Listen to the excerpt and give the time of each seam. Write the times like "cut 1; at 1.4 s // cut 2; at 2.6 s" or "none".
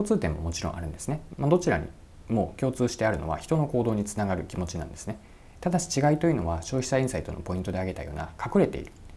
cut 1; at 1.3 s